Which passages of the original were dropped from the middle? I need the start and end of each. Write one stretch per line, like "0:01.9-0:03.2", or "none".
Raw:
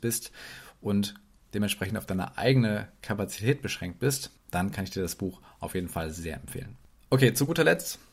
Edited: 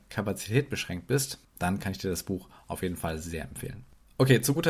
none